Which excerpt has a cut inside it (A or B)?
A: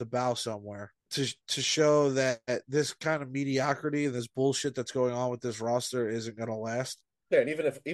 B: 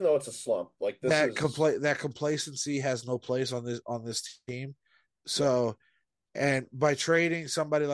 A